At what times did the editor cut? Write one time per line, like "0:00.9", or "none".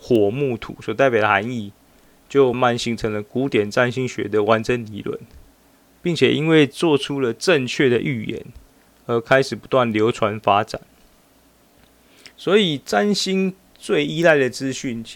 0:02.5